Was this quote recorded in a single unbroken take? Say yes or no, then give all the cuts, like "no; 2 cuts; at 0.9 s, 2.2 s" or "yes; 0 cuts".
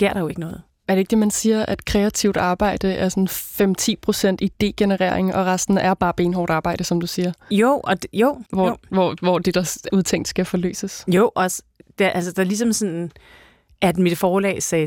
no; 2 cuts; at 8.5 s, 9.9 s